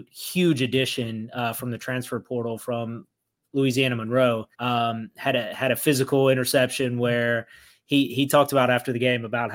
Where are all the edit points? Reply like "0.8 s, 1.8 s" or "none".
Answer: 4.5 s